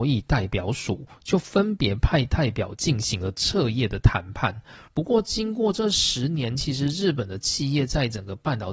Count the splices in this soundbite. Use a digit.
1